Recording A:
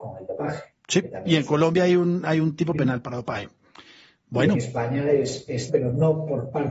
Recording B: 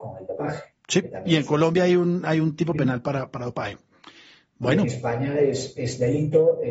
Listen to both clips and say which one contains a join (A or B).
A